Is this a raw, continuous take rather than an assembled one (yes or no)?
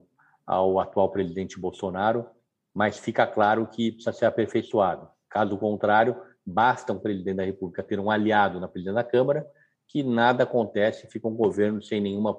yes